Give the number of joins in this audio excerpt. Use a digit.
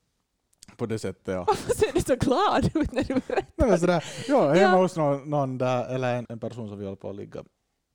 1